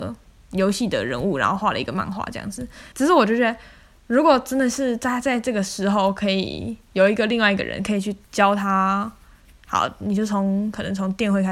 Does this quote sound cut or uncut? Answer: cut